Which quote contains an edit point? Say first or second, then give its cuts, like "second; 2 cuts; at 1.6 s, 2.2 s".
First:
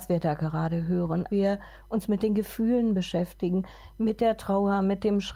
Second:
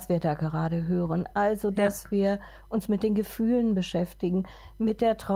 first; 1 cut; at 1.3 s